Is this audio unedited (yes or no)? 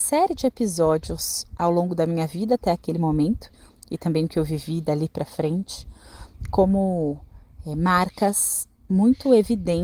yes